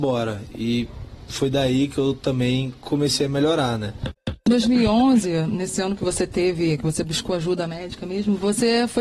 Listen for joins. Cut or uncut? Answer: uncut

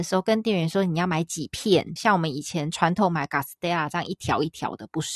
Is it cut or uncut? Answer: cut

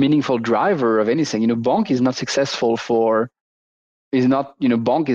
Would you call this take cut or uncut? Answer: uncut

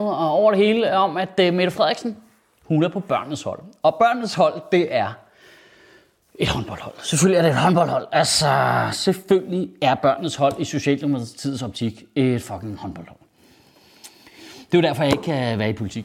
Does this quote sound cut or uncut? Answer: uncut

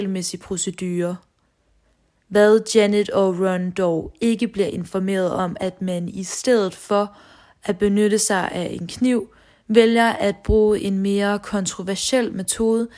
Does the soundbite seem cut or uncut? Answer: cut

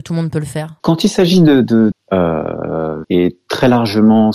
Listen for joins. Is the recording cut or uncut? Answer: cut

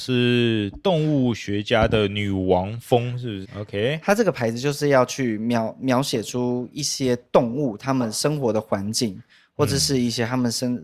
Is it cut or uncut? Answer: cut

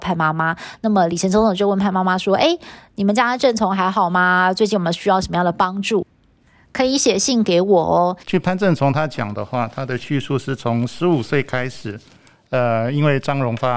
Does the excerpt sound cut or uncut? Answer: cut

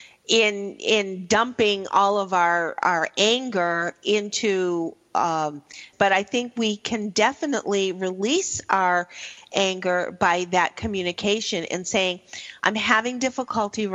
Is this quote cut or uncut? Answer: cut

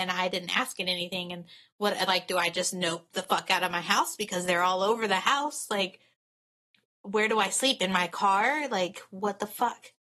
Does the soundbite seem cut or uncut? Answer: uncut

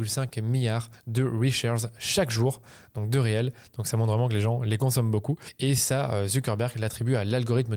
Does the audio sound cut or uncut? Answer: uncut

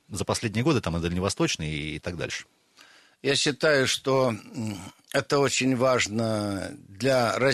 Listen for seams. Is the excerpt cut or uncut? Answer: uncut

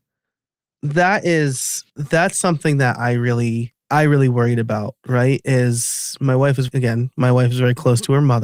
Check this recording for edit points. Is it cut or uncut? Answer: cut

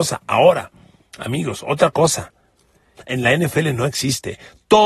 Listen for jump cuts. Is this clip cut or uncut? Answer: cut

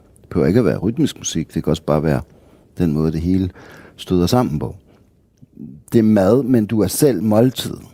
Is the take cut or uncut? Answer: uncut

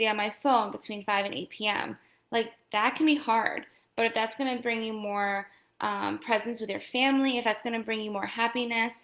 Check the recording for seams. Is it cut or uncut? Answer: uncut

